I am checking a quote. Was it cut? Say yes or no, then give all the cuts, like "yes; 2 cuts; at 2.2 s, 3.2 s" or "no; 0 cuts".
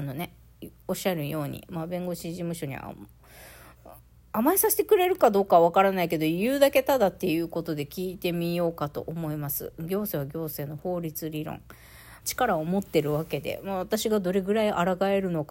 yes; 1 cut; at 12.2 s